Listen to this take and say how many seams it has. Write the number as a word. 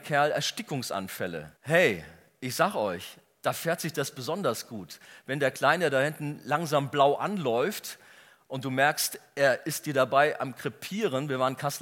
one